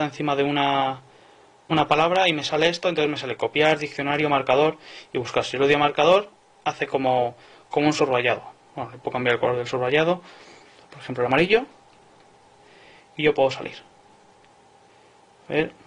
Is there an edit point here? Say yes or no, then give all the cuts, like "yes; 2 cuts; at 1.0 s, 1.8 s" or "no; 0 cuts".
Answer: no; 0 cuts